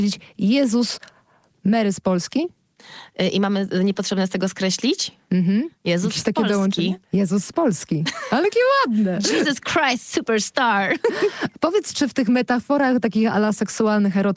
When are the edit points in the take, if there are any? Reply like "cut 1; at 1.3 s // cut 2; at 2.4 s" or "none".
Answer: cut 1; at 7.0 s